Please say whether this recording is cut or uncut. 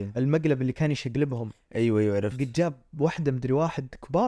uncut